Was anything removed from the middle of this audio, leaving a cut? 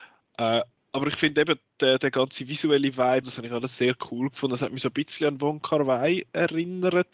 yes; 1 cut; at 3.2 s

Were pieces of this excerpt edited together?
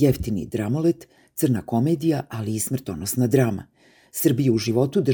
no; 0 cuts

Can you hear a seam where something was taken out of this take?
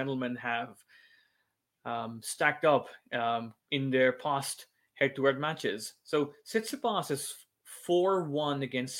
yes; 1 cut; at 3.6 s

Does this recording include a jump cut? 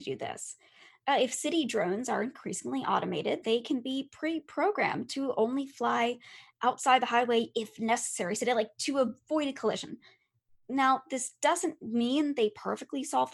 yes; 1 cut; at 3.4 s

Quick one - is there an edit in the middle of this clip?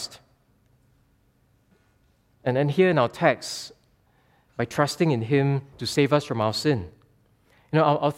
yes; 3 cuts; at 2.3 s, 4.5 s, 5.7 s

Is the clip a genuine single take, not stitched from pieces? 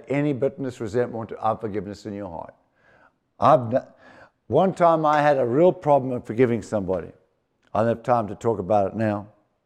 yes; 0 cuts

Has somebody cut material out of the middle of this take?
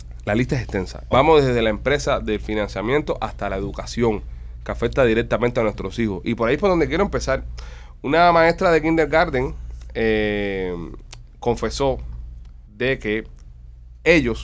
yes; 2 cuts; at 1.1 s, 12.6 s

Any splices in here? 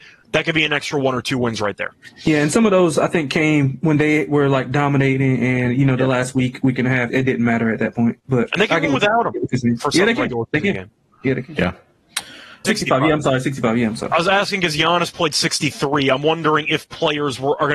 yes; 2 cuts; at 7.1 s, 12.6 s

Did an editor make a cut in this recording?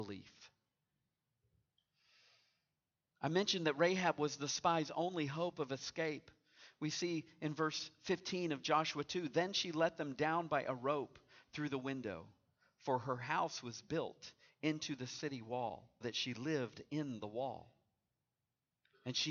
yes; 1 cut; at 16.0 s

